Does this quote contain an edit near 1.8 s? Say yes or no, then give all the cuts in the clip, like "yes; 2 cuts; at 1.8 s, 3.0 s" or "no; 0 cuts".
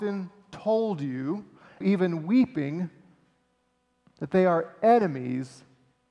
yes; 1 cut; at 1.8 s